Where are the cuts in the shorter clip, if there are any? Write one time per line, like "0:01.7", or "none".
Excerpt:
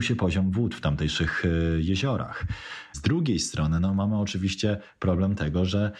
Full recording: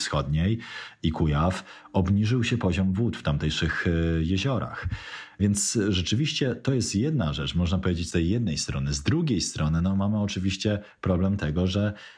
0:02.9